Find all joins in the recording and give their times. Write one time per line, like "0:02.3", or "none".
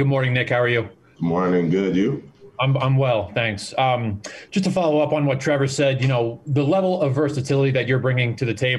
none